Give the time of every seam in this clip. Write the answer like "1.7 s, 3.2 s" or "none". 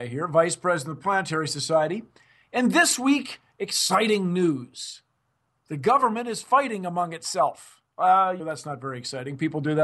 8.4 s